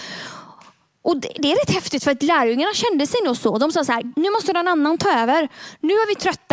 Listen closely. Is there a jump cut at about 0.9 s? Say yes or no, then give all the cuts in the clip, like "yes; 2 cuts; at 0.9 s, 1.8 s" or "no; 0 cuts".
no; 1 cut; at 4.1 s